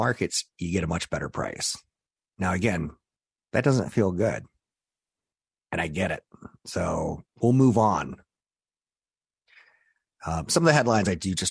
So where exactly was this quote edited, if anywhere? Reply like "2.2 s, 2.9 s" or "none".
none

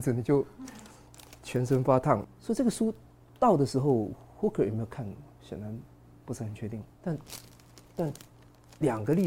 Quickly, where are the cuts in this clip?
2.2 s, 6.9 s

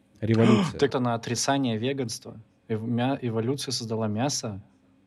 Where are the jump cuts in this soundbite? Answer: 0.9 s

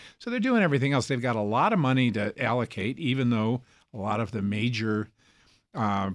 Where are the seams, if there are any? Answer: none

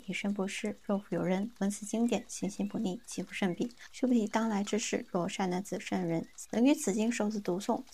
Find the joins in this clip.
3.9 s

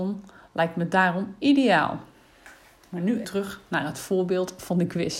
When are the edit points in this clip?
3.2 s

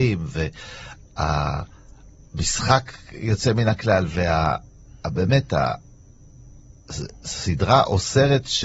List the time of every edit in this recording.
none

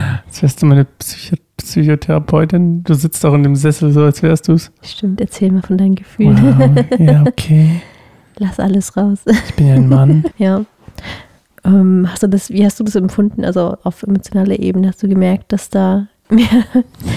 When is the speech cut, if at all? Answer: 10.3 s

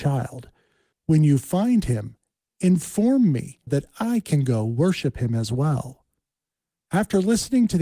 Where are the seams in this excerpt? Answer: 3.7 s

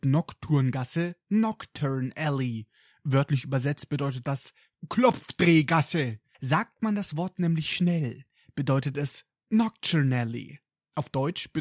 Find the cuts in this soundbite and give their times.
6.3 s

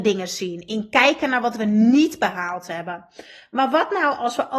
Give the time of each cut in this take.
none

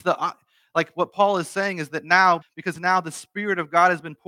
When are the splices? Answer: 2.4 s

